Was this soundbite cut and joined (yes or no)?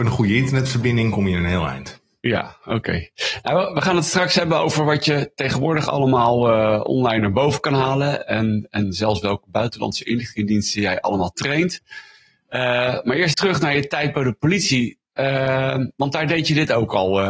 yes